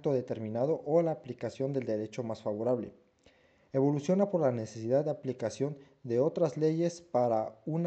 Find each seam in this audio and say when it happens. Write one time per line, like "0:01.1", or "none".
none